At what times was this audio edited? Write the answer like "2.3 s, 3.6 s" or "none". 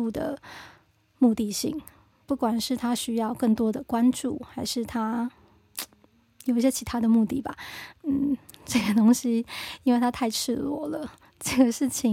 none